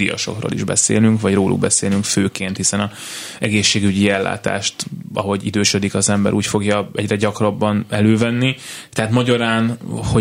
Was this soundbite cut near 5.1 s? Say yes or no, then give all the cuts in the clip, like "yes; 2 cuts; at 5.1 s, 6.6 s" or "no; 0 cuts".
no; 0 cuts